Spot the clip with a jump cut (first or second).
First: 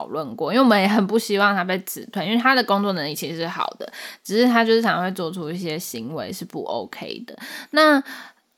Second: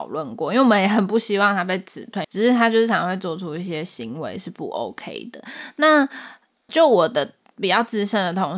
second